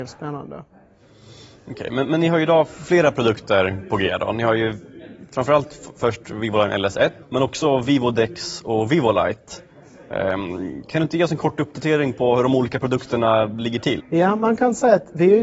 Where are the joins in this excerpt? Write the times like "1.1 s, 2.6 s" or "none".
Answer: 7.2 s, 14.0 s